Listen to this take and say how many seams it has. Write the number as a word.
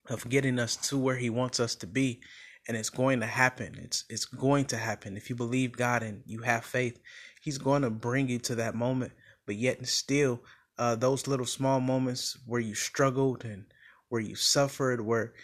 zero